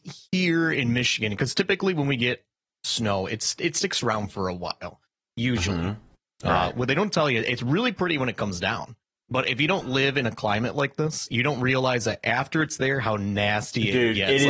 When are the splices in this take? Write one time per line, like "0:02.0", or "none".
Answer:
none